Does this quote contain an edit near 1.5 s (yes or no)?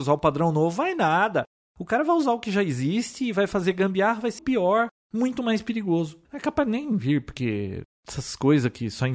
no